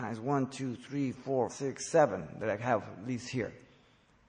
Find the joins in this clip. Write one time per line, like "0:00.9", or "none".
0:01.5